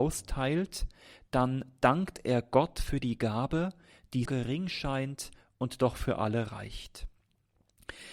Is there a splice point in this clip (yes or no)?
yes